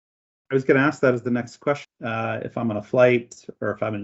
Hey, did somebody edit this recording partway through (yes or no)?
yes